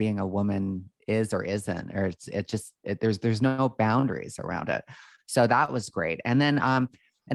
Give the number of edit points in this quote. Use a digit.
0